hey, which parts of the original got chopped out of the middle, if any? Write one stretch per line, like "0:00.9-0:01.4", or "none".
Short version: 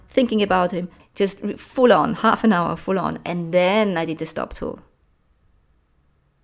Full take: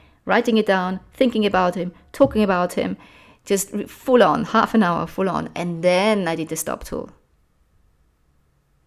0:02.0-0:03.3